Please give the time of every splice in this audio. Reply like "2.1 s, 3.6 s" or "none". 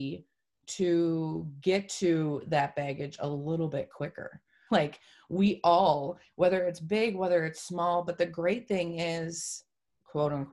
4.7 s